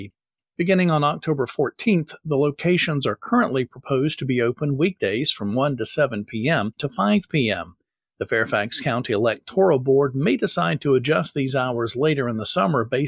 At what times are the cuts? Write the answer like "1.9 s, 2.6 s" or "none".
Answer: 6.8 s